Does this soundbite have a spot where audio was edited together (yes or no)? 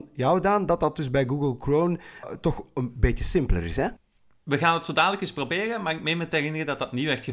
yes